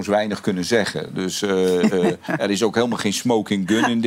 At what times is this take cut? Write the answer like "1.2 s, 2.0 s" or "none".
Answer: none